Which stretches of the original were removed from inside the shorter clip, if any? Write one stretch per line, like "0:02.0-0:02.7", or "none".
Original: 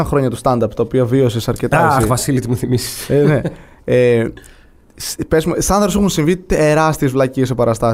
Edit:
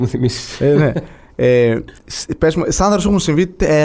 0:04.5-0:04.9